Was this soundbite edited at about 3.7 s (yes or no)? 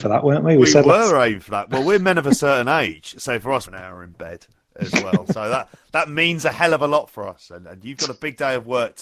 yes